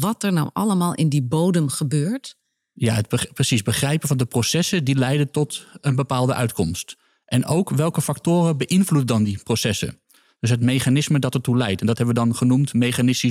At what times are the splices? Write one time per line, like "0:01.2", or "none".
none